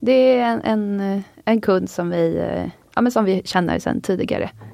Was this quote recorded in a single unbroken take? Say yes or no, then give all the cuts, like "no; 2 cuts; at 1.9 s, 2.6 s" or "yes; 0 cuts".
yes; 0 cuts